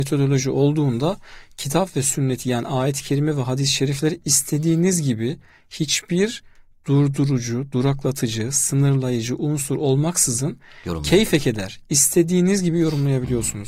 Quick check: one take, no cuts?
yes; 0 cuts

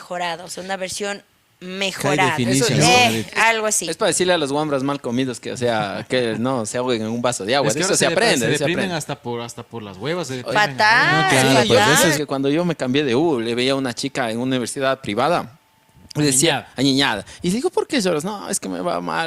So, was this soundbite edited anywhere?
yes; 1 cut; at 12.1 s

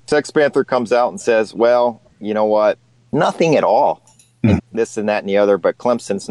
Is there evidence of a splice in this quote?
yes; 2 cuts; at 3.1 s, 4.6 s

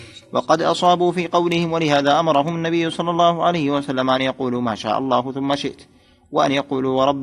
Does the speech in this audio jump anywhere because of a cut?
no; 0 cuts

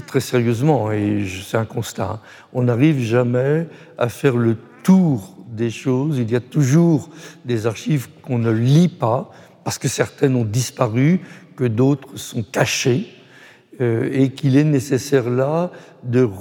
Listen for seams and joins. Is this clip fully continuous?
yes; 0 cuts

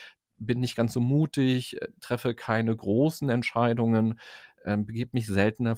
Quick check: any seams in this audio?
no; 0 cuts

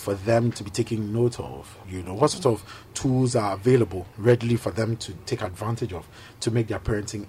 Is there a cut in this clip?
no; 0 cuts

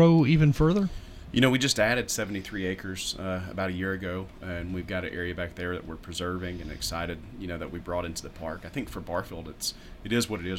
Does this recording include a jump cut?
no; 0 cuts

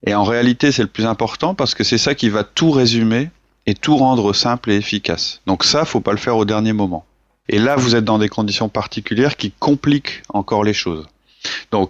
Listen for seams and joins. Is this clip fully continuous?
no; 1 cut; at 7.4 s

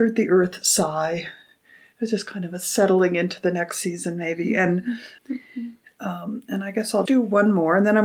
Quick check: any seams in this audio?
yes; 2 cuts; at 5.2 s, 7.1 s

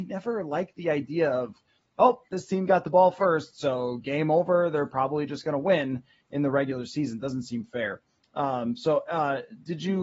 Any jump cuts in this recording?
no; 0 cuts

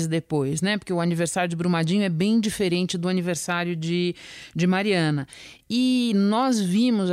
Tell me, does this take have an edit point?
no; 0 cuts

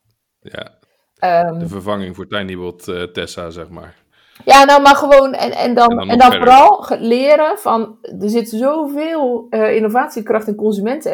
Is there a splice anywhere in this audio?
no; 0 cuts

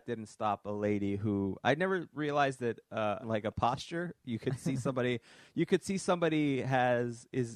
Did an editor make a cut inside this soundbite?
yes; 1 cut; at 3.2 s

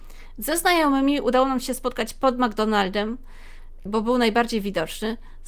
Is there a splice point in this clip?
yes; 1 cut; at 3.9 s

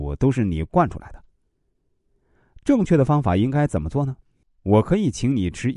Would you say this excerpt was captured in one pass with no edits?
no; 1 cut; at 4.4 s

